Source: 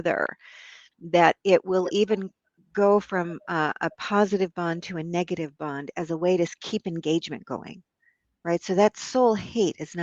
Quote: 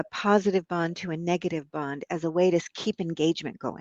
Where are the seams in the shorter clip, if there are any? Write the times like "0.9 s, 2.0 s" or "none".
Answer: none